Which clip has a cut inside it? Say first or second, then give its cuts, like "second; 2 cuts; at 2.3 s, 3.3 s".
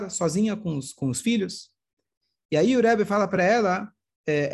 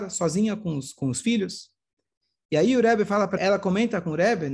second; 1 cut; at 3.4 s